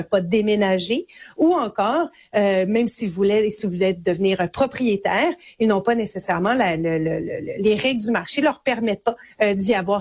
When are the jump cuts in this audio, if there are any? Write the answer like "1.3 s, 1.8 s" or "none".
none